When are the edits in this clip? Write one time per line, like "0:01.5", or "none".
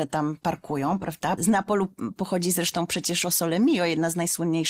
0:01.4